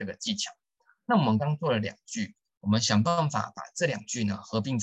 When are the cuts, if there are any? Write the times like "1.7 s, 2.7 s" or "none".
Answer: 1.4 s